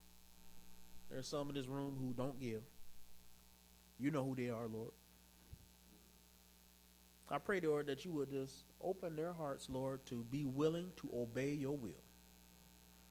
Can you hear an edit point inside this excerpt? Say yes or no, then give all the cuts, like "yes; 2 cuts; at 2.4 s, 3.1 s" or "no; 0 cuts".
no; 0 cuts